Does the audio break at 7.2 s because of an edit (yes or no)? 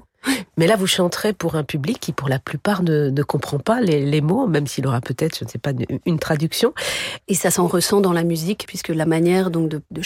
yes